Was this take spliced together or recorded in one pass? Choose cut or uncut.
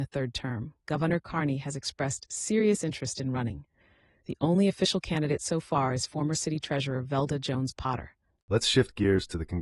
uncut